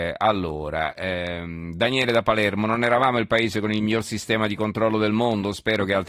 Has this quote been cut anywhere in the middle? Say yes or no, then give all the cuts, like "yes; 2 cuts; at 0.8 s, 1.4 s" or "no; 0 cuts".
no; 0 cuts